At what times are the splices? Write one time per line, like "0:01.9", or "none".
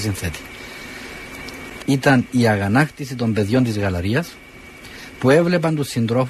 0:01.8